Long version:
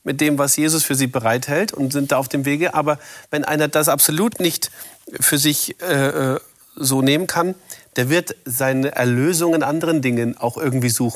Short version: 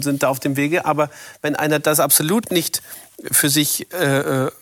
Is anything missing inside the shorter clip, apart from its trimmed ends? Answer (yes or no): no